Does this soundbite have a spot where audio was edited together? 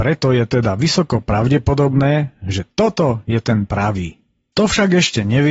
yes; 1 cut; at 4.5 s

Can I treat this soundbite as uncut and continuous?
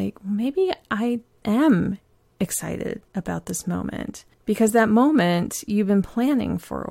no; 2 cuts; at 1.4 s, 4.3 s

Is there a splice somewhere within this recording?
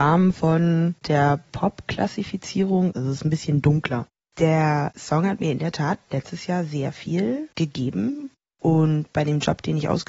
yes; 1 cut; at 2.9 s

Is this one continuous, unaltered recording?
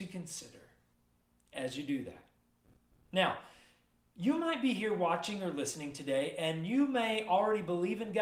yes; 0 cuts

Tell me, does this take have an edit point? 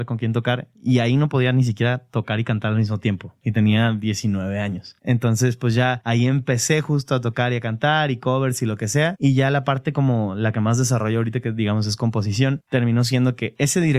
no; 0 cuts

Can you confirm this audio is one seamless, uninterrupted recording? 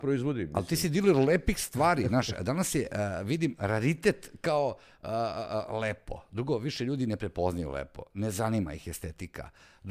yes; 0 cuts

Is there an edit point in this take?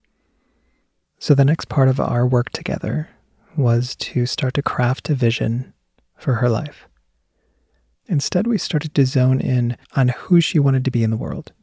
yes; 3 cuts; at 1.0 s, 7.9 s, 9.8 s

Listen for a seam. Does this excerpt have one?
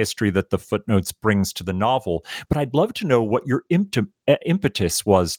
no; 0 cuts

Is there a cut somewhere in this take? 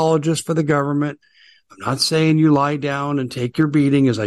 no; 0 cuts

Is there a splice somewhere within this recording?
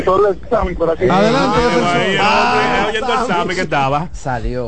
no; 0 cuts

